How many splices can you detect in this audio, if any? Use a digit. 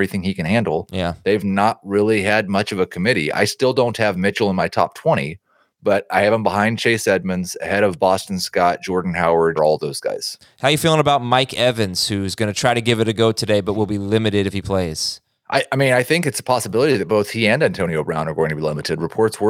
1